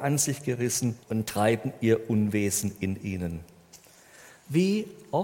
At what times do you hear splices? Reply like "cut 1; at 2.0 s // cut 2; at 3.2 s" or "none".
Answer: cut 1; at 1.0 s